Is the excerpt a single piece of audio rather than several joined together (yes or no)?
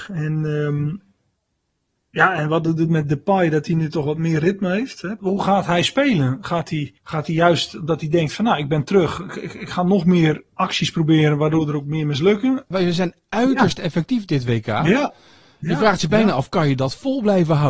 no